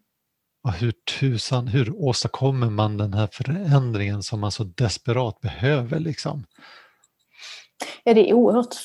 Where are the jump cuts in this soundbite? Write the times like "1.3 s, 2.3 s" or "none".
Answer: none